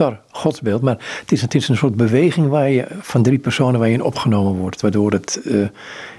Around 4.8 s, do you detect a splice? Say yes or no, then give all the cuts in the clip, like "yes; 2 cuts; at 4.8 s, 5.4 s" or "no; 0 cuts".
no; 0 cuts